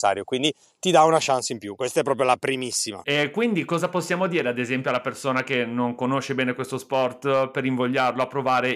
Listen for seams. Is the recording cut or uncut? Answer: uncut